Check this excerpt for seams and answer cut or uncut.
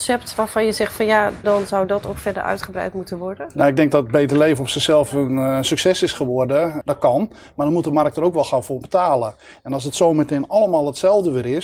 cut